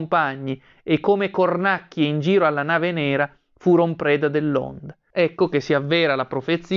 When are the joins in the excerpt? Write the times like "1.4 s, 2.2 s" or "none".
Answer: 5.1 s